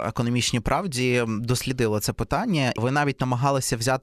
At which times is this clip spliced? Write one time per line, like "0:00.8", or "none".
0:02.8